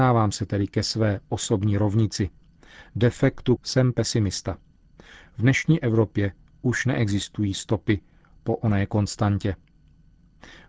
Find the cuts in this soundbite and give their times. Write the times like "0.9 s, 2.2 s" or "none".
3.6 s